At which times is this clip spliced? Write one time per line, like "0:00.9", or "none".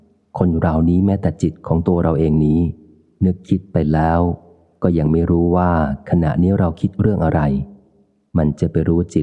none